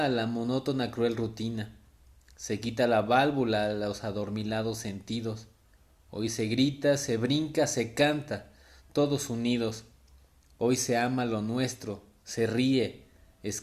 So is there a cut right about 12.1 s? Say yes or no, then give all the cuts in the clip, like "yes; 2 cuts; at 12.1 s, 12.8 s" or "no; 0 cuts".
no; 0 cuts